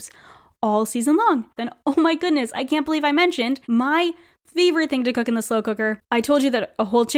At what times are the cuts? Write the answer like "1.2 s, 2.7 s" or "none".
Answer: 1.6 s, 3.6 s